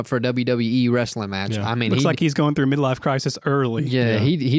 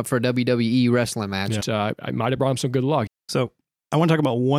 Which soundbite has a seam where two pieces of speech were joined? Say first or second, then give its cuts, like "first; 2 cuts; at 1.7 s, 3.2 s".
second; 2 cuts; at 1.6 s, 3.1 s